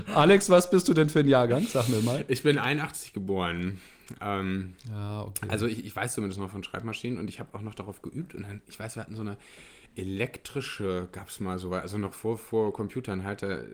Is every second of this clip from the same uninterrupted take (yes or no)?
yes